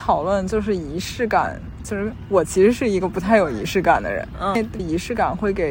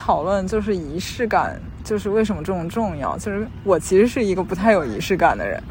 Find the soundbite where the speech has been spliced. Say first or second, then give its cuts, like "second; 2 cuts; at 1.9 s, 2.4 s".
first; 2 cuts; at 1.8 s, 4.8 s